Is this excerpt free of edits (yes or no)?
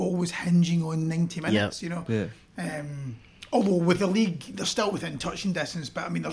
yes